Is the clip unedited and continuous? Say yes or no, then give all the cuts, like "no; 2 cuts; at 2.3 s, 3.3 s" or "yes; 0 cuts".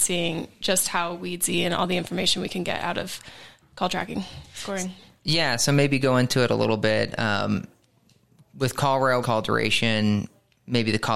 no; 1 cut; at 9.2 s